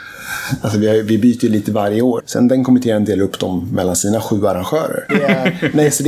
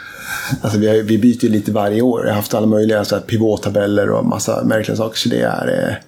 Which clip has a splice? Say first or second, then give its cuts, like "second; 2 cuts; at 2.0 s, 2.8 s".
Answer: first; 2 cuts; at 2.2 s, 5.1 s